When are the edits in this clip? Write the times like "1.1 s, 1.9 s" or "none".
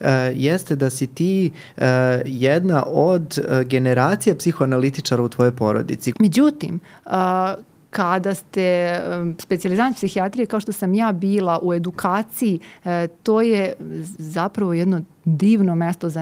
6.1 s